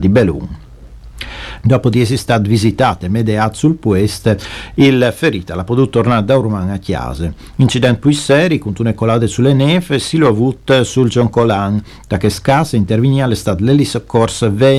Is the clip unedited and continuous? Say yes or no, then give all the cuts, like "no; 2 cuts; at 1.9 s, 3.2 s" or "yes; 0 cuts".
no; 1 cut; at 1.6 s